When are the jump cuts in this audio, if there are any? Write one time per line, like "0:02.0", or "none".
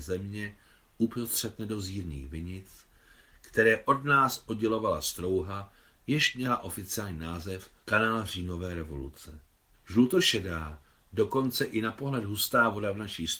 0:07.8
0:09.7